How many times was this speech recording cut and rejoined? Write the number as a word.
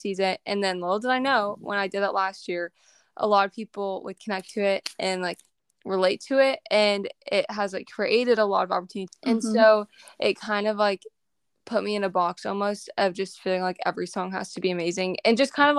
one